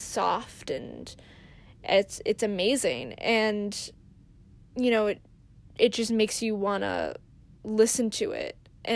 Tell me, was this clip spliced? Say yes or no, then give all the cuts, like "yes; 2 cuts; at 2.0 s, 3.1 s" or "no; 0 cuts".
no; 0 cuts